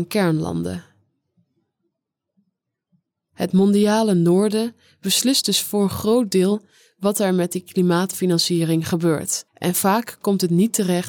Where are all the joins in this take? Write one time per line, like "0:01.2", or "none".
0:09.5